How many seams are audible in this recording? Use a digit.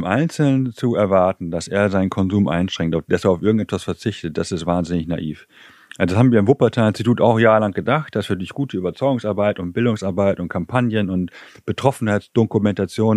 0